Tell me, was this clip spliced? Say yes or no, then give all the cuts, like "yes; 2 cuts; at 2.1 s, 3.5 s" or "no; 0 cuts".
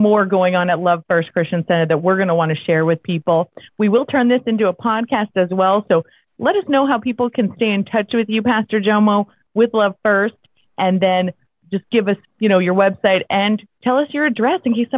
no; 0 cuts